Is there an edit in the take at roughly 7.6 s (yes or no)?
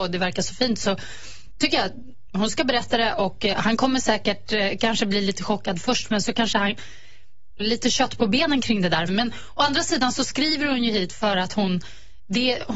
yes